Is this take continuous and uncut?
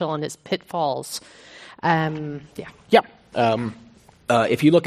no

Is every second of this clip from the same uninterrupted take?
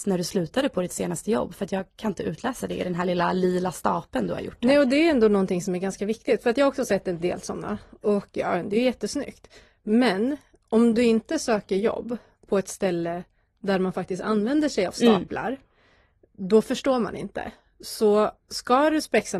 yes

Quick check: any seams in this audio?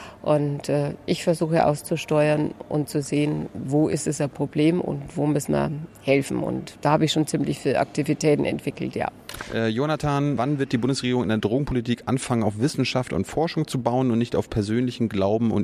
yes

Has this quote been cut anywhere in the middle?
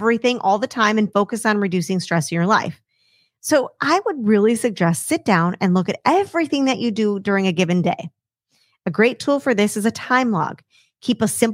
yes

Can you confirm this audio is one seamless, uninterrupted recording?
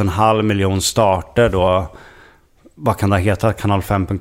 yes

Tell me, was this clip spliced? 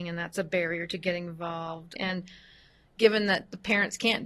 yes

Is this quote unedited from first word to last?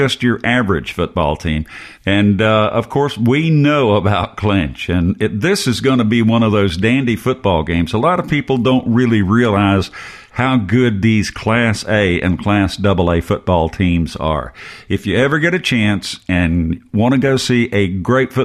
no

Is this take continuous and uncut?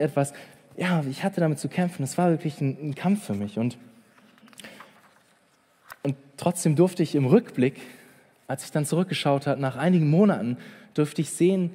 yes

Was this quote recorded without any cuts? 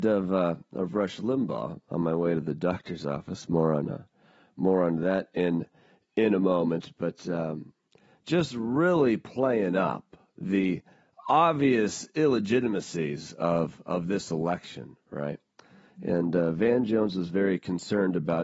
yes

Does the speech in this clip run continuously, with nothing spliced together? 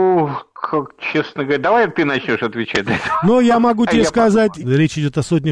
no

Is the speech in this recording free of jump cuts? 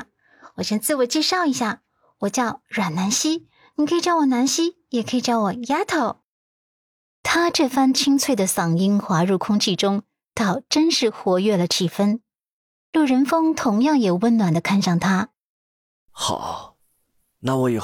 yes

